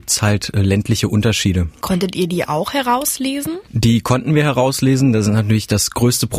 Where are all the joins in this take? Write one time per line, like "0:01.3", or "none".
0:03.6